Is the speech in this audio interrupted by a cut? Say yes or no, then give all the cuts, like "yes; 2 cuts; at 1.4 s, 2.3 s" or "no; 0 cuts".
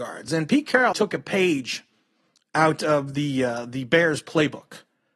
yes; 1 cut; at 0.9 s